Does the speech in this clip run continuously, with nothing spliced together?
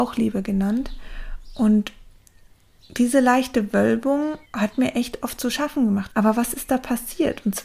no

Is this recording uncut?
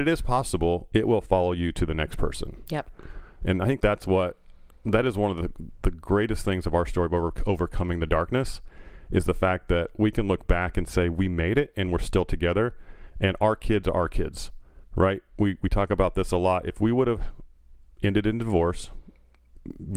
no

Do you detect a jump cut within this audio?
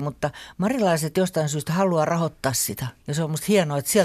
yes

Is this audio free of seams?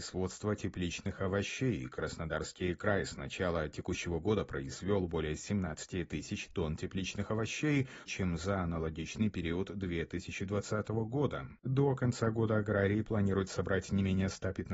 no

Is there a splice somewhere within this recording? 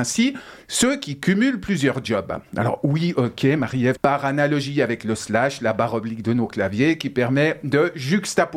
yes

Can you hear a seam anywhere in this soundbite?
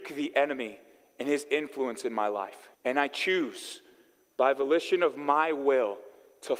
yes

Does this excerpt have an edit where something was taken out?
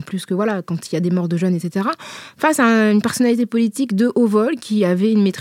no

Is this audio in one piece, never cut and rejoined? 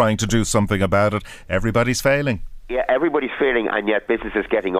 yes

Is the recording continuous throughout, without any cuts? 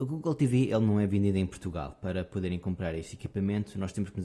yes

